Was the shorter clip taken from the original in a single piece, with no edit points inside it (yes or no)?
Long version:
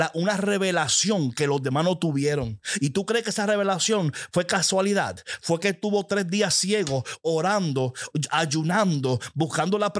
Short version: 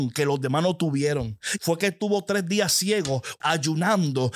no